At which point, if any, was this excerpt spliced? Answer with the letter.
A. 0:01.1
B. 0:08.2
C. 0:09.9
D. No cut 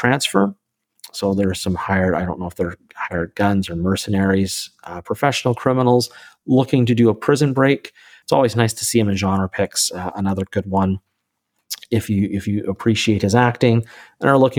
B